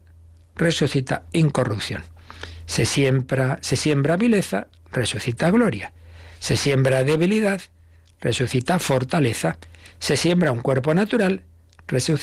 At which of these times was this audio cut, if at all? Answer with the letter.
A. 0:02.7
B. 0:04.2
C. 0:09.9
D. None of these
D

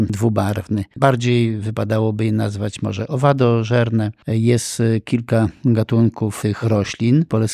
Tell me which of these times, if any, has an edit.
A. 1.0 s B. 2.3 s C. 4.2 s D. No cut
A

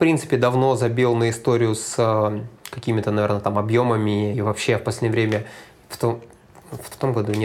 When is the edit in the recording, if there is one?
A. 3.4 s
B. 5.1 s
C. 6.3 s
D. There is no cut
D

